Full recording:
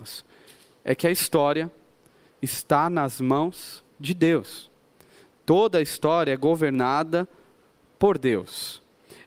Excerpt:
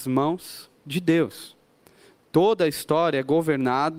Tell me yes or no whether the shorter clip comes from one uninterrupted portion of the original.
yes